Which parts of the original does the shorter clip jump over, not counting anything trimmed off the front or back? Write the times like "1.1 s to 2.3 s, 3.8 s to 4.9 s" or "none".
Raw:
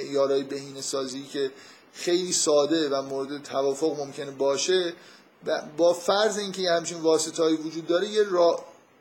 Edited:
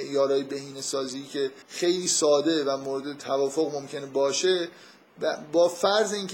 1.6 s to 1.9 s